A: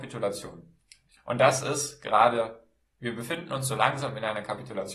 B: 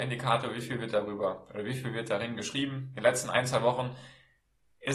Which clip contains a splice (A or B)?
A